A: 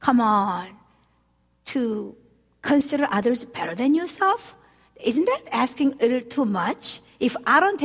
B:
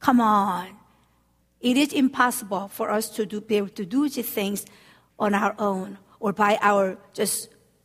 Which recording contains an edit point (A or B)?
B